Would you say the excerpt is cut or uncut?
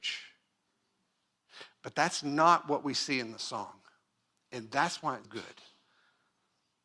cut